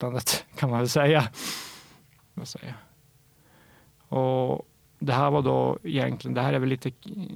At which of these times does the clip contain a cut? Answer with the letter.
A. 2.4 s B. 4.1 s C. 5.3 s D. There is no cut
A